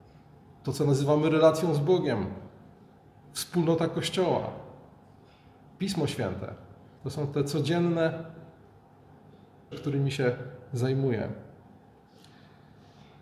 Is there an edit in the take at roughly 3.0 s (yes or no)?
no